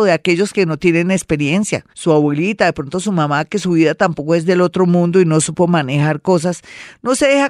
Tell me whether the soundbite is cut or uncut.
cut